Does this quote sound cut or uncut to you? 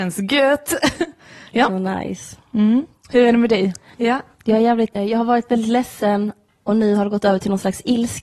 cut